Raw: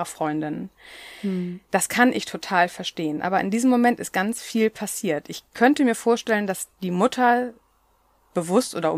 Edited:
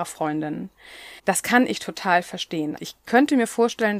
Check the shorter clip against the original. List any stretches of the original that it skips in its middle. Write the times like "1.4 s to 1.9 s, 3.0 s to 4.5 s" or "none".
1.2 s to 1.6 s, 3.2 s to 5.2 s